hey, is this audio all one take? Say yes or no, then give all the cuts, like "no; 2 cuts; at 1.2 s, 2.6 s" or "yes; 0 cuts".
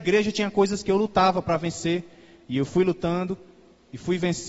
yes; 0 cuts